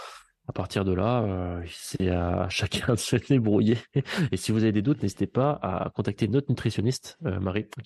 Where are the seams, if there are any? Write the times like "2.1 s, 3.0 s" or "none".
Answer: none